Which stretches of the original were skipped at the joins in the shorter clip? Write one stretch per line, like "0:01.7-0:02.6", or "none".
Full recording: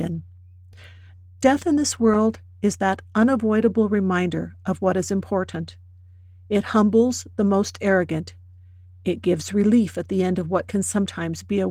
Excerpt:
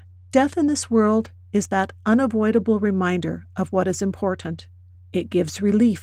0:06.0-0:08.9